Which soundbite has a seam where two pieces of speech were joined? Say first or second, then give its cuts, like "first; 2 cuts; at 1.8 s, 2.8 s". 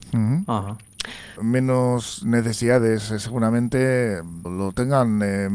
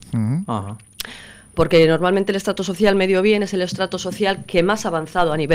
first; 2 cuts; at 1.4 s, 4.4 s